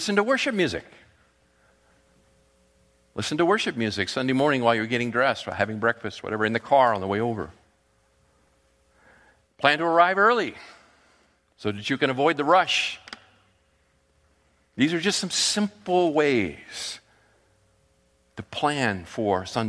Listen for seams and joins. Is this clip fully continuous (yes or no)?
yes